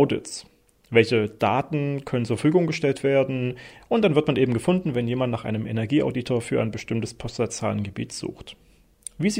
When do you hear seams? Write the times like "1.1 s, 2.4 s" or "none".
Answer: 3.8 s